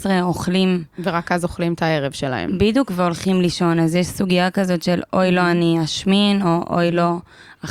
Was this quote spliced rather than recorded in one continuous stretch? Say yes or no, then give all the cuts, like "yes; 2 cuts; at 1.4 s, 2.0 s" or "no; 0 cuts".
no; 0 cuts